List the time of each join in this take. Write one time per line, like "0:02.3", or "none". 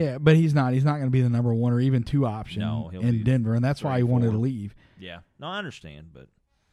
none